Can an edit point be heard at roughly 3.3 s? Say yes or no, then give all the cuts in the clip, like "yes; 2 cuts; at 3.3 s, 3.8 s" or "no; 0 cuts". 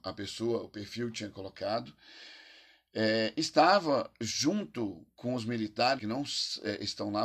no; 1 cut; at 6.0 s